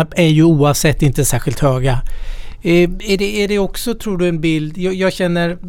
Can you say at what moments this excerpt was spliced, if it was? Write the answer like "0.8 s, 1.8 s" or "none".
none